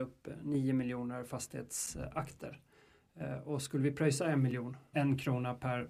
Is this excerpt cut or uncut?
cut